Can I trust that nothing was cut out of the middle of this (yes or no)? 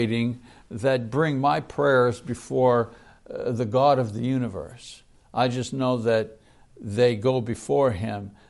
yes